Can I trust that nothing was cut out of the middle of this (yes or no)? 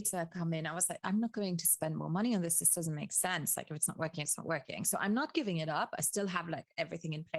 yes